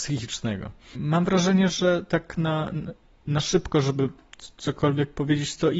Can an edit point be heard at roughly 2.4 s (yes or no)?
no